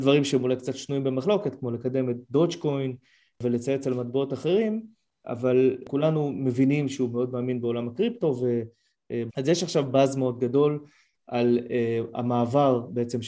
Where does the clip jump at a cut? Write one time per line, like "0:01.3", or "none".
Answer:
0:09.3